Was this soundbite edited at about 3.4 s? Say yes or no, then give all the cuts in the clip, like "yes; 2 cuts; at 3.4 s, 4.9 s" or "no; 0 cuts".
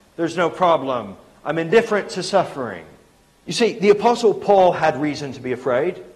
yes; 1 cut; at 3.4 s